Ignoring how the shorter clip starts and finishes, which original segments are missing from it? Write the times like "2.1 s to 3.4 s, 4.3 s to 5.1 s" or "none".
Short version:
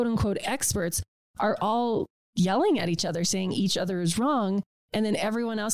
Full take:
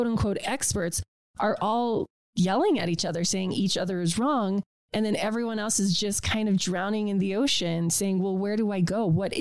none